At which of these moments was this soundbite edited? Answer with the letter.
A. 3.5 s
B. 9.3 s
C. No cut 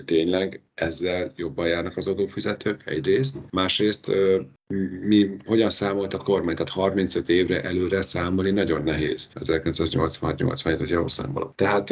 B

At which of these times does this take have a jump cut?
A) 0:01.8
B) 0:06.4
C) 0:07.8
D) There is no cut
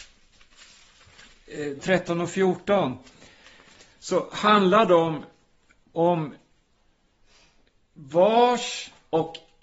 A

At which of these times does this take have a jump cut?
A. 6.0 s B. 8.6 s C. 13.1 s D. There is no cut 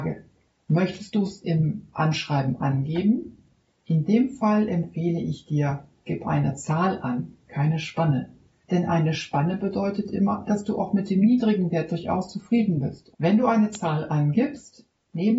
C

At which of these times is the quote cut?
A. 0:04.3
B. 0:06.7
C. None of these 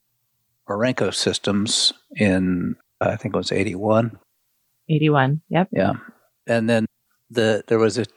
C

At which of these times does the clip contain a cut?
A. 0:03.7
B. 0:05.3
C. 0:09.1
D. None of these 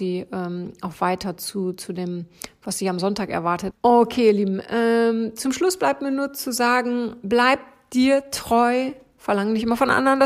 A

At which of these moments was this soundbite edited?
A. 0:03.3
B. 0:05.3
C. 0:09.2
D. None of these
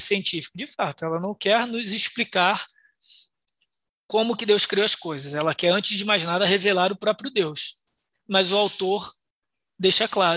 D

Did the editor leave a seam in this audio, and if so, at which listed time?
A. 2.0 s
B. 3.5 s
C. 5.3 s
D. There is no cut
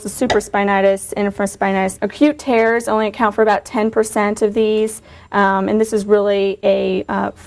A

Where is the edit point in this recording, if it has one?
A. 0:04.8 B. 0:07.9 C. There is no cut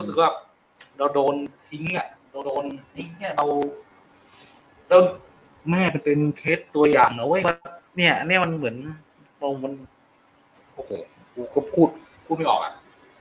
B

